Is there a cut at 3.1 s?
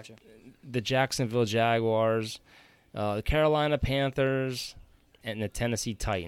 no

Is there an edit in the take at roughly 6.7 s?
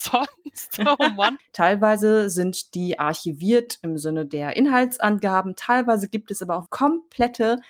yes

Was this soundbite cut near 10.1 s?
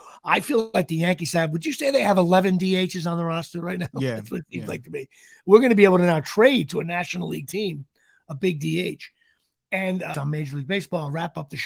yes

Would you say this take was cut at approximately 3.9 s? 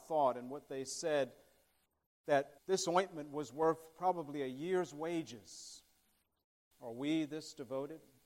no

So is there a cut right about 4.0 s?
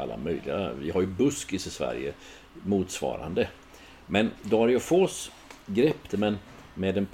no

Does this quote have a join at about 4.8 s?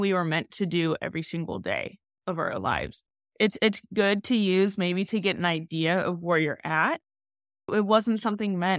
no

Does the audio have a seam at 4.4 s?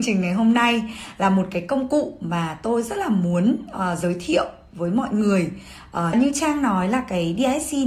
no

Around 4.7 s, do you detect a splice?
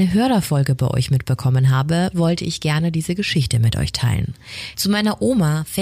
yes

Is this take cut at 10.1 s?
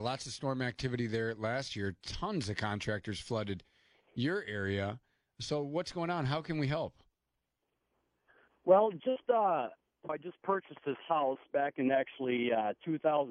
yes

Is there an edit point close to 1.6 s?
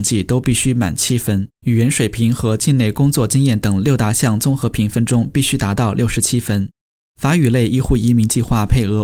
yes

